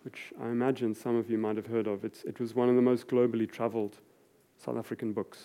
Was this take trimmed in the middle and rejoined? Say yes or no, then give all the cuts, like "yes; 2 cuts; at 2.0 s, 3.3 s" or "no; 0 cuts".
no; 0 cuts